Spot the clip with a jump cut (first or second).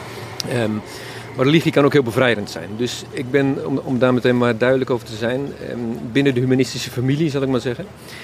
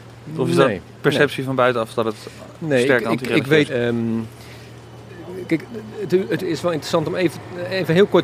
second